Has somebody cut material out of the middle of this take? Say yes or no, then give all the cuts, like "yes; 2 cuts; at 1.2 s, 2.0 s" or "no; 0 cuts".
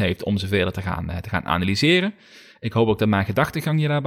no; 0 cuts